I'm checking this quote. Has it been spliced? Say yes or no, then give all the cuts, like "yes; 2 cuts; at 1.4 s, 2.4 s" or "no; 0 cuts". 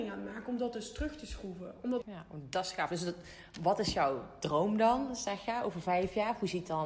yes; 1 cut; at 2.0 s